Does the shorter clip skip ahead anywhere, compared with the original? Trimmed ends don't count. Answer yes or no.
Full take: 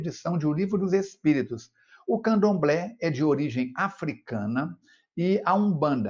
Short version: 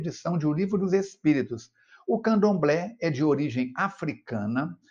no